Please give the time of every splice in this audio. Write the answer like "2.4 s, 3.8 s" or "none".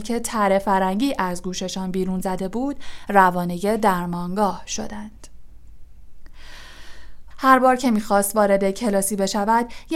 7.3 s